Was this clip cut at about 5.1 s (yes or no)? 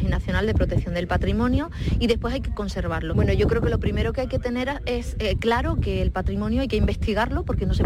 no